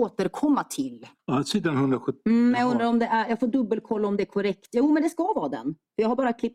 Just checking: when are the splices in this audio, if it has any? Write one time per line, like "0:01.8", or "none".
0:01.1